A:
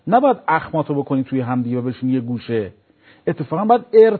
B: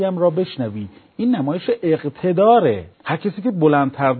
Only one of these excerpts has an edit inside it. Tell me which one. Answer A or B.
B